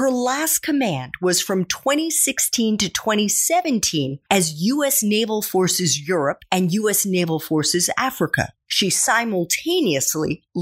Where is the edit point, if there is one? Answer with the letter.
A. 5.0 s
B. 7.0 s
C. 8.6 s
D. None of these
D